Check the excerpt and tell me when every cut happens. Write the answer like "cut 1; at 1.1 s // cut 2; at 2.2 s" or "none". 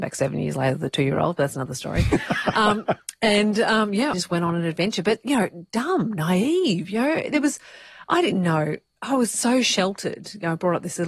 cut 1; at 4.1 s